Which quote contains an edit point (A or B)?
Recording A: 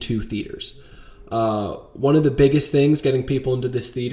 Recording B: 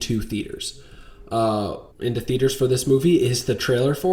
B